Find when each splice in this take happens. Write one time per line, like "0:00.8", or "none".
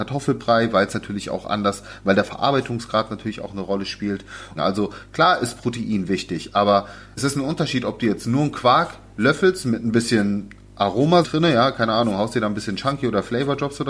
0:04.6
0:11.2